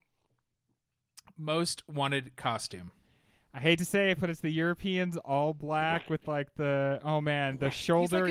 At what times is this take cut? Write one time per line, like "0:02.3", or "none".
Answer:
none